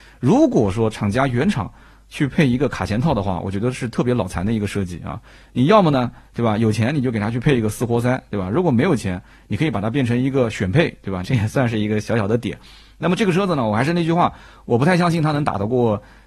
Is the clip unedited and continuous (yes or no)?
no